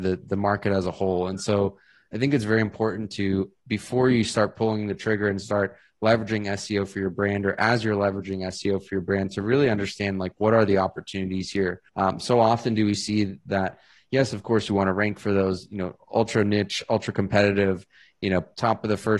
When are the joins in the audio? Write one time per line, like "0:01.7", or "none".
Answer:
0:11.9